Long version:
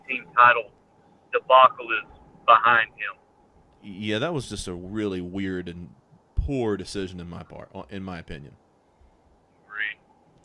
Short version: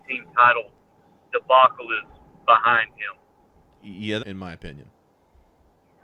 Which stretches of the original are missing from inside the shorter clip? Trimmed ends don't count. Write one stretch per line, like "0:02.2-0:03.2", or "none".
0:04.2-0:07.9